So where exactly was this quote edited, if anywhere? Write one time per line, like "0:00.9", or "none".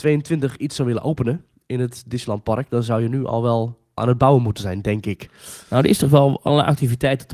none